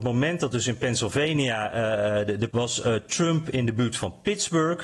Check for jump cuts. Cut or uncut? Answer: cut